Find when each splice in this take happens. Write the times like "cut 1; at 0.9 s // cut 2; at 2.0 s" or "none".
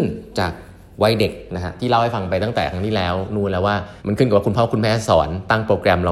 cut 1; at 4.0 s